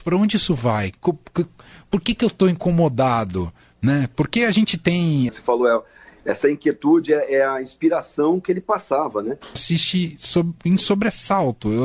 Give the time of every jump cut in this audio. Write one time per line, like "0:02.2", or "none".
0:05.3
0:09.6